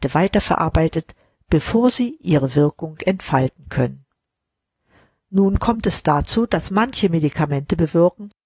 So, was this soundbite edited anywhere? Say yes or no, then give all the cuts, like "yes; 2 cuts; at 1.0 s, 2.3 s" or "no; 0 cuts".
no; 0 cuts